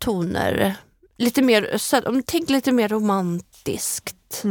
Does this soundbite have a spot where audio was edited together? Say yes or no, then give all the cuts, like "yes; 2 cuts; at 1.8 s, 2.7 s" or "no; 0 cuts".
no; 0 cuts